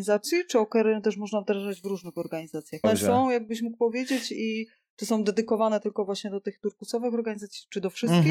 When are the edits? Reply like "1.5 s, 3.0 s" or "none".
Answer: 2.8 s